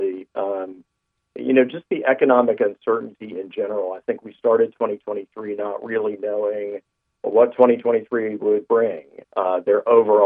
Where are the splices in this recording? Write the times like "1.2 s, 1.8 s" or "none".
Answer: 9.2 s